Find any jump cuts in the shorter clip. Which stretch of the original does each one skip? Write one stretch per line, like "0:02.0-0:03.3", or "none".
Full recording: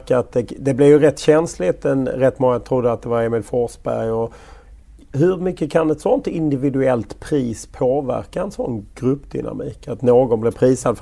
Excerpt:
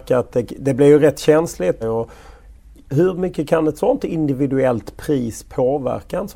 0:01.8-0:04.0